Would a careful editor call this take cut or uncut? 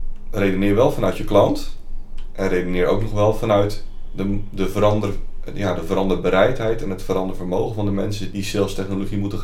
cut